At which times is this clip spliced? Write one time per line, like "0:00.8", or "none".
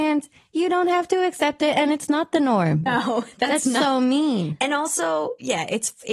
0:02.9